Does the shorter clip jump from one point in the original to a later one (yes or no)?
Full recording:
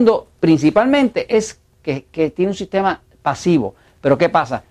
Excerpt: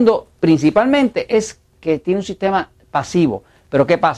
yes